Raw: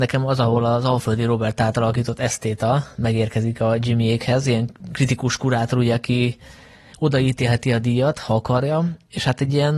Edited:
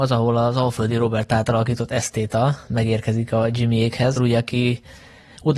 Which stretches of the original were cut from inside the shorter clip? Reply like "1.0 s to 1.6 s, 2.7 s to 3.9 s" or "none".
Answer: 4.4 s to 5.7 s